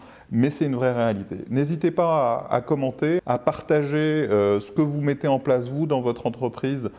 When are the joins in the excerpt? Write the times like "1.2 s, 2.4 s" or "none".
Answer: 3.2 s